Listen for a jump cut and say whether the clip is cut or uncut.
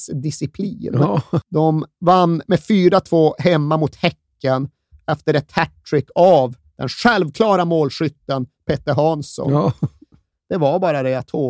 cut